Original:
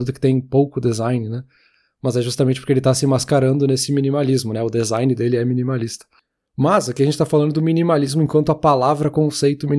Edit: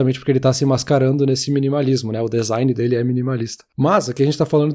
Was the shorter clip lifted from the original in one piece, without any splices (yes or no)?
no